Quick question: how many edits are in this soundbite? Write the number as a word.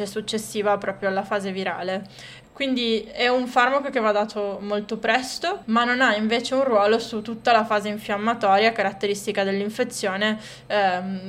two